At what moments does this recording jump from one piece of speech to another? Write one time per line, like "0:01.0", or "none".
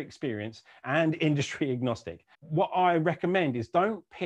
0:02.3